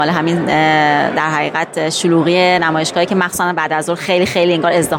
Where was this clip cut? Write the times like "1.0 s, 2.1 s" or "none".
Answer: none